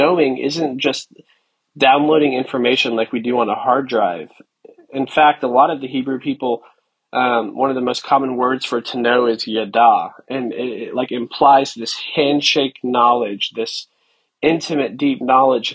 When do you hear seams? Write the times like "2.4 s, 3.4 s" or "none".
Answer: none